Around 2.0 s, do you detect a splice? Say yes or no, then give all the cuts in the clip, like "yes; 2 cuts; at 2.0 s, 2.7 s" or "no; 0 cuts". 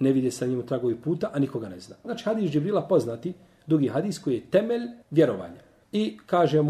yes; 2 cuts; at 2.0 s, 5.0 s